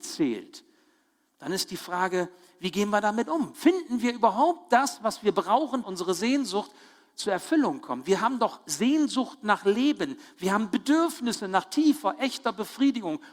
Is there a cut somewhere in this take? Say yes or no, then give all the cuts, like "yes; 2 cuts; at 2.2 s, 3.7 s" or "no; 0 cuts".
yes; 1 cut; at 5.8 s